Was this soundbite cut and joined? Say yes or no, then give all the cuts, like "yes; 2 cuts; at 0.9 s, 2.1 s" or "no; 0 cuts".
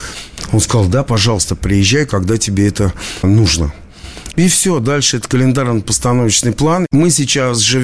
yes; 1 cut; at 6.9 s